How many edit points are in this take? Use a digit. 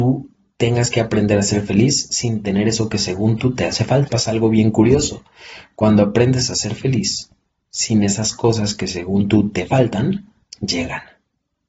1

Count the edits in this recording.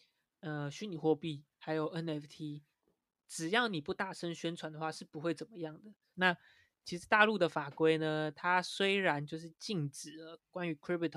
1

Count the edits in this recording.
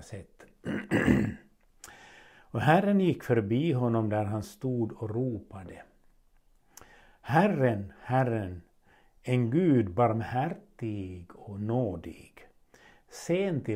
0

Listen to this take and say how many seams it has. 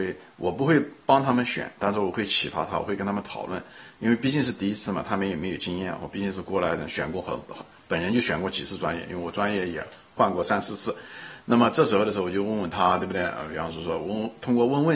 0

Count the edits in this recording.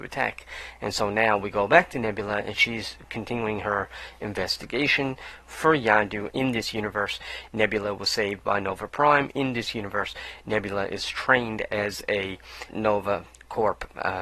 2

